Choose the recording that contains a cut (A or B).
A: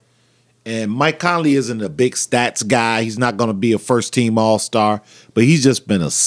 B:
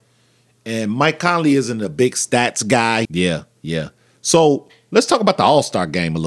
B